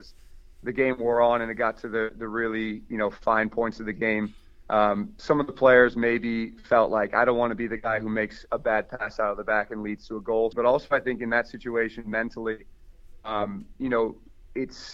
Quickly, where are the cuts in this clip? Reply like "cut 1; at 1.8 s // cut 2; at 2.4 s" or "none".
cut 1; at 10.5 s